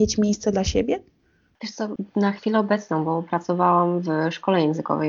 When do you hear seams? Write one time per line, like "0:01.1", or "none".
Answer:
none